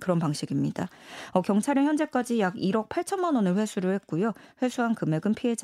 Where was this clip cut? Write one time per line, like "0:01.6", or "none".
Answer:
none